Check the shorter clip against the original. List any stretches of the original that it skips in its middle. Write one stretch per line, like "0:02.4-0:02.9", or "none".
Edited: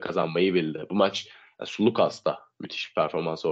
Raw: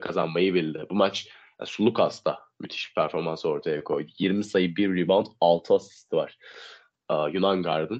none